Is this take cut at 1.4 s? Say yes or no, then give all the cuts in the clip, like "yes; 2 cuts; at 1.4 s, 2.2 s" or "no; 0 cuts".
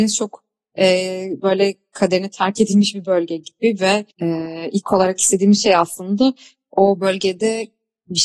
no; 1 cut; at 4.1 s